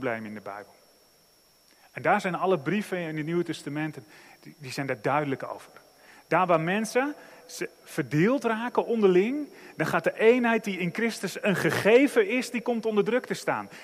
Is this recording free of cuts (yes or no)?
yes